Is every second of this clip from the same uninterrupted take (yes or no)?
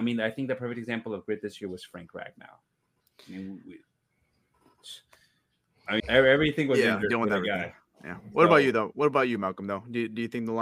no